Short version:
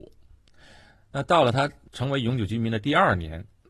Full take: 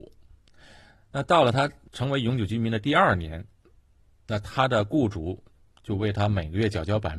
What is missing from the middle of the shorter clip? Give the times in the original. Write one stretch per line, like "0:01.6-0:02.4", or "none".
none